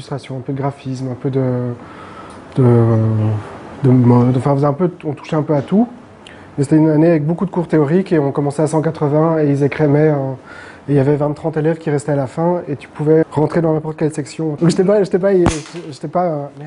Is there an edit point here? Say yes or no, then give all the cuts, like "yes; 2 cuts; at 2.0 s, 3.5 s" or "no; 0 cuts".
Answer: yes; 2 cuts; at 13.2 s, 14.6 s